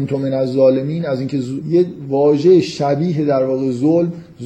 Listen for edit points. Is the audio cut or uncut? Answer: cut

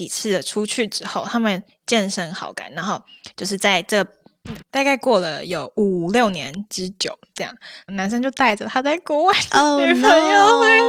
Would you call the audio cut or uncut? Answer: cut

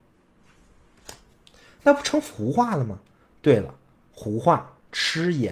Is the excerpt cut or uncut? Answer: uncut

